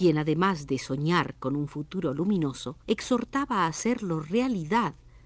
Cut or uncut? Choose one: cut